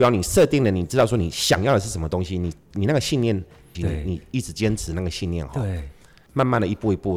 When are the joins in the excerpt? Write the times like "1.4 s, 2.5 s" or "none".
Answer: 3.7 s